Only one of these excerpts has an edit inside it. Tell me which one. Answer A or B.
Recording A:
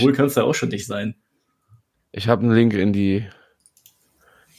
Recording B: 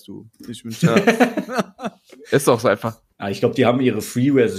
B